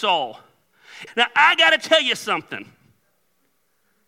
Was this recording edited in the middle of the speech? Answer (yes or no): yes